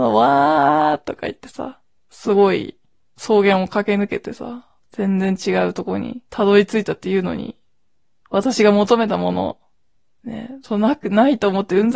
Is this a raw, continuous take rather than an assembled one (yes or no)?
yes